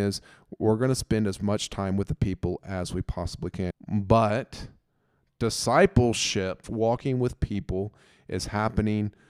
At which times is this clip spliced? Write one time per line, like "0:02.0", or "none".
0:03.7
0:06.6